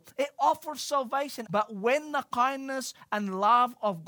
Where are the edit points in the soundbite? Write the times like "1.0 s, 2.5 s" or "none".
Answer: 1.5 s